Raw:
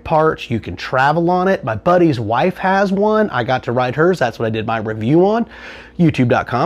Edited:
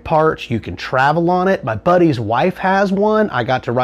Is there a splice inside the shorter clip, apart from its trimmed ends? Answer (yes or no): no